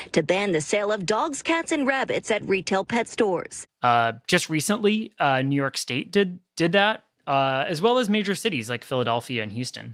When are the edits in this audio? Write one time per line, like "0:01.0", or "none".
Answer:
0:03.7